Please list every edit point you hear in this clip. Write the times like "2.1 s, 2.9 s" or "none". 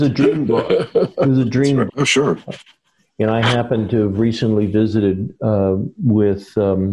1.9 s